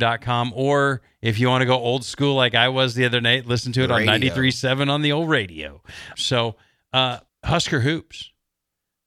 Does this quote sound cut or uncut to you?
cut